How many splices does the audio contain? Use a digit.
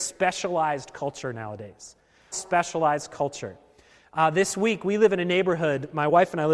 1